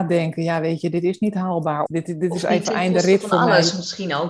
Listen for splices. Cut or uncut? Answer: cut